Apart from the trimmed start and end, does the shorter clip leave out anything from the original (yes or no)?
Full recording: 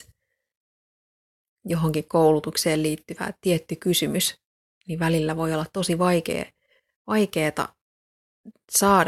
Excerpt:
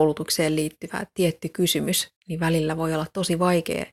yes